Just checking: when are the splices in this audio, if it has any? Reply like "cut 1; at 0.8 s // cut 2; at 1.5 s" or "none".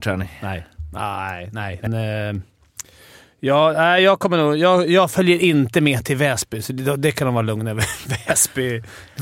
cut 1; at 1.9 s